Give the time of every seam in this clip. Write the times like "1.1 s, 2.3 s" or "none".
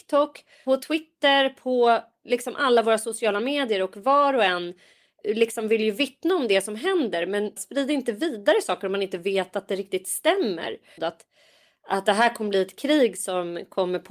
7.6 s, 11.0 s